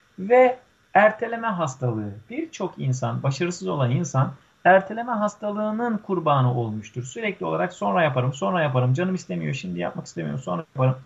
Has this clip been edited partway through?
no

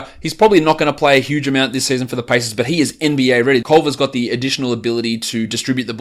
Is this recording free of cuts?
no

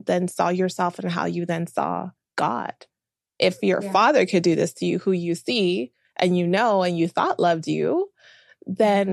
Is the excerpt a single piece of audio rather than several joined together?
yes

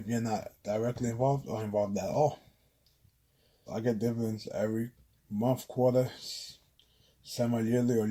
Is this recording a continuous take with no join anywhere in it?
no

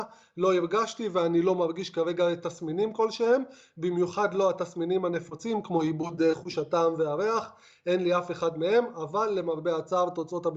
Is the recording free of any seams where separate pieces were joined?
yes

